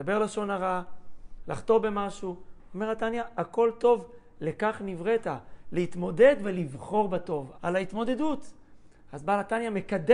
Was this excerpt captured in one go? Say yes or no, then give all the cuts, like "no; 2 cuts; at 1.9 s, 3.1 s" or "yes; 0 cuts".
no; 1 cut; at 7.5 s